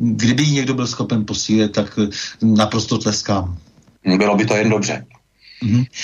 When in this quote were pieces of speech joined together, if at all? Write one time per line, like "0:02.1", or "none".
none